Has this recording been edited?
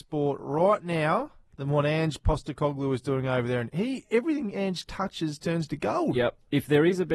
no; 0 cuts

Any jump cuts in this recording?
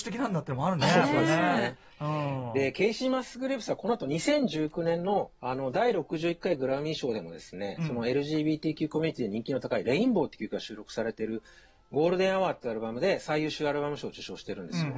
yes; 1 cut; at 5.4 s

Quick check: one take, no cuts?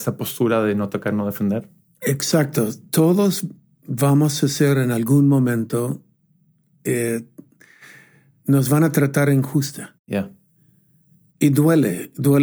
yes; 0 cuts

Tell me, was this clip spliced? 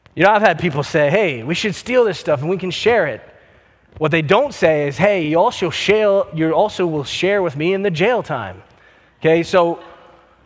no; 0 cuts

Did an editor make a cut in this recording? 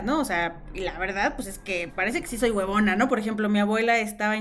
yes; 2 cuts; at 1.9 s, 3.1 s

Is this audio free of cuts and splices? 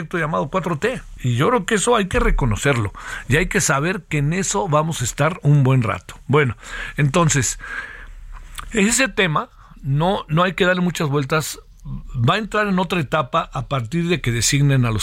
yes; 0 cuts

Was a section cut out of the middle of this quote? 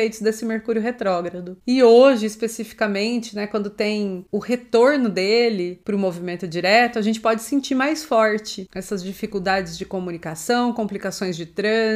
no; 0 cuts

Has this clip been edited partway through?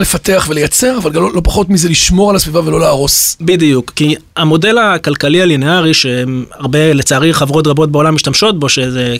no; 0 cuts

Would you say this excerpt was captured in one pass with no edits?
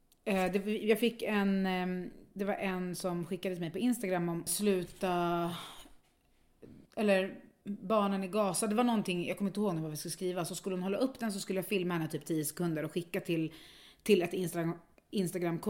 no; 1 cut; at 4.5 s

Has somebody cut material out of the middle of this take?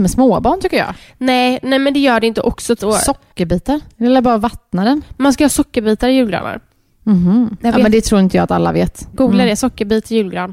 yes; 2 cuts; at 2.8 s, 9.1 s

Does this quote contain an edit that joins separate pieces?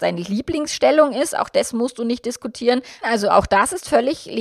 yes; 1 cut; at 3.0 s

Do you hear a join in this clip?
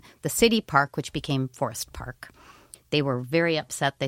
yes; 1 cut; at 2.7 s

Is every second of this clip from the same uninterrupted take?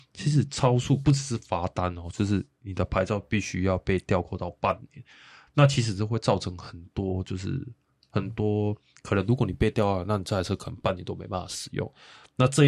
yes; 0 cuts

